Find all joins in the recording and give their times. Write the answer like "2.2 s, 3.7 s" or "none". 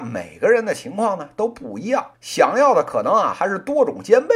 2.1 s